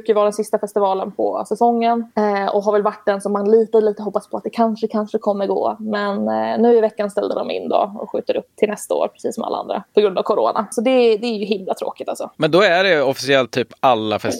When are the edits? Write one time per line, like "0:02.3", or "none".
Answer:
none

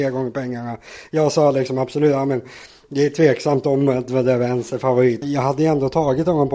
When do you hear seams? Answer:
0:05.2

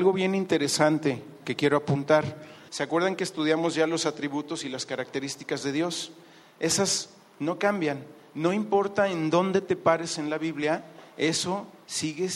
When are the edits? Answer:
0:02.7

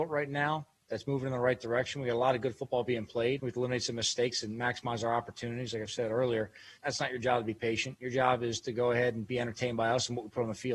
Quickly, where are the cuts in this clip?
0:03.4
0:06.8

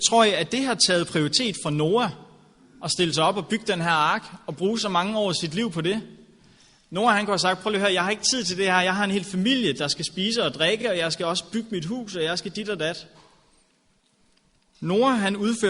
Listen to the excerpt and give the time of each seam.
none

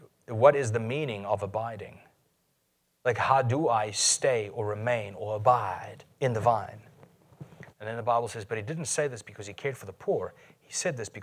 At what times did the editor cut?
0:06.1
0:07.7

